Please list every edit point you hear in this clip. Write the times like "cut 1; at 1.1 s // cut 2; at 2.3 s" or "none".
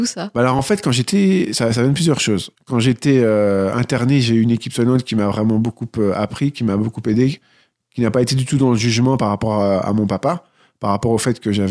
none